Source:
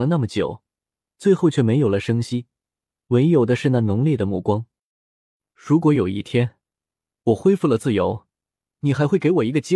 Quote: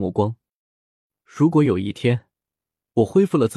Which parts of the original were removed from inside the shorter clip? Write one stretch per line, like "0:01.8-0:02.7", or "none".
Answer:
none